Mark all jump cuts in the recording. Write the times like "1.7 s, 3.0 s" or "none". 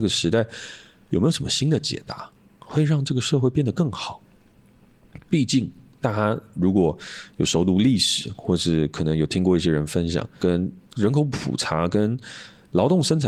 10.4 s